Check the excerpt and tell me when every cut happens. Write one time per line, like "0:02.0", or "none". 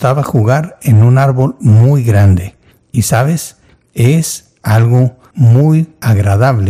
none